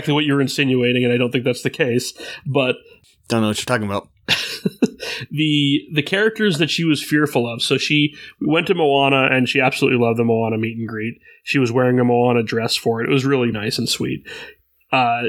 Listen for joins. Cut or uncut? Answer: cut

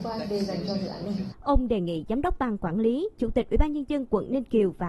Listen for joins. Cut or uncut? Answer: cut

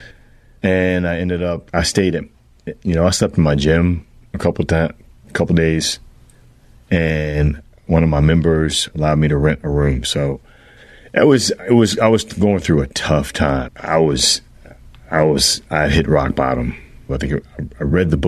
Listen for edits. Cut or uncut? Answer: cut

